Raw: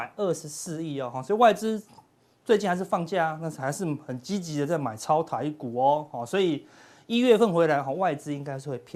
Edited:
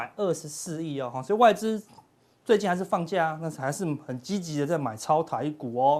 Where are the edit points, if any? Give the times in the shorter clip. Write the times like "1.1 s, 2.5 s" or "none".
none